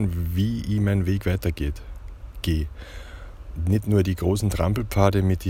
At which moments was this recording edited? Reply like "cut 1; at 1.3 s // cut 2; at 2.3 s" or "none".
none